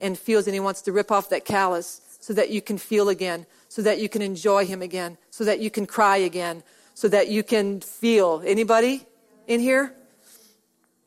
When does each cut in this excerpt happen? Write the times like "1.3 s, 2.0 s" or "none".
none